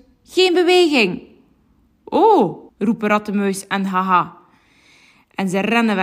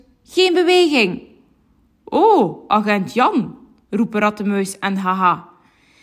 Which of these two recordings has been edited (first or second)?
first